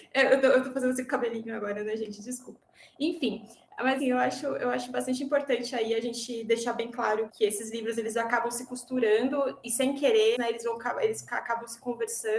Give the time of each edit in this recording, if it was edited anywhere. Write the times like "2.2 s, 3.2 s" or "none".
4.0 s, 7.3 s, 10.3 s